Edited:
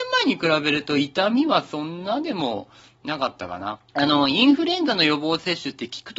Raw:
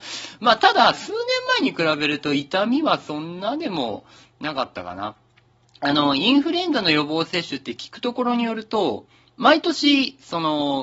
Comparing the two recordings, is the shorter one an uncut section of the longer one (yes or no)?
no